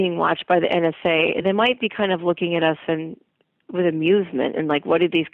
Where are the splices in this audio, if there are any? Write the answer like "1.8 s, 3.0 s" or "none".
none